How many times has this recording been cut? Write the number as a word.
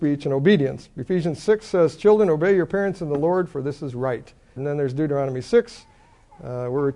one